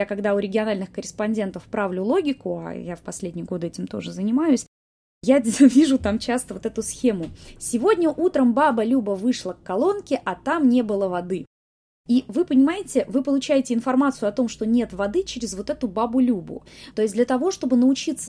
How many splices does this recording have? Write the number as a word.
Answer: one